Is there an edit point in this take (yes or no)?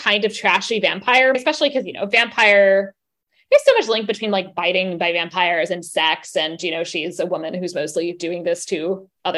yes